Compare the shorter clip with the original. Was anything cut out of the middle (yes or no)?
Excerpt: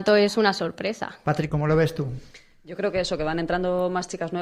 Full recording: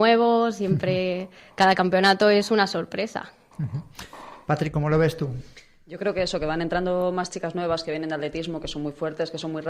yes